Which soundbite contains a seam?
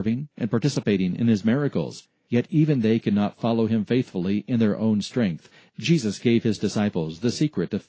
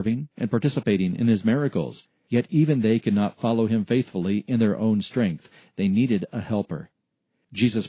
first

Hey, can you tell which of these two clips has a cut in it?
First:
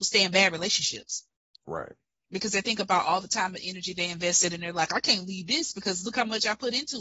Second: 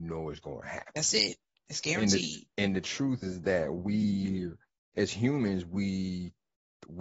second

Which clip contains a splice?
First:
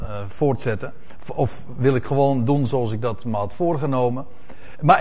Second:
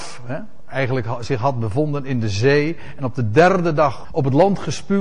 second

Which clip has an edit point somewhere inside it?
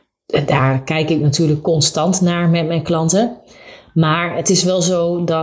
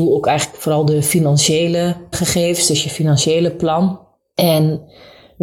second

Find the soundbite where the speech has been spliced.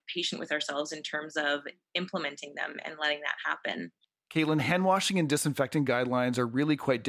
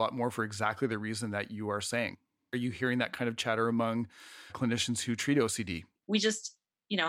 second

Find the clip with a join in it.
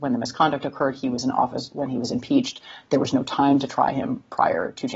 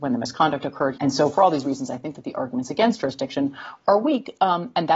second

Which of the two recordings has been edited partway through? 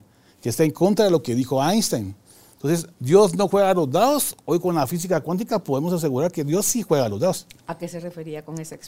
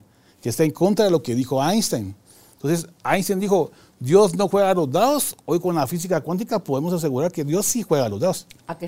first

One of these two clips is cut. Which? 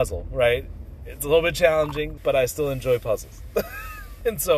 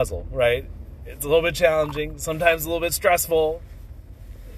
first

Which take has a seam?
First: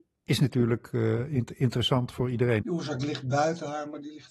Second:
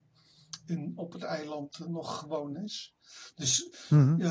first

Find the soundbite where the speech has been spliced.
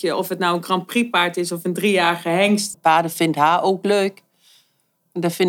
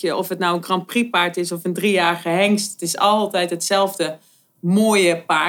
first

